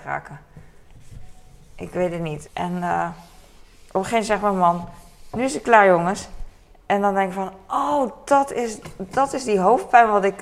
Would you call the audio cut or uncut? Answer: cut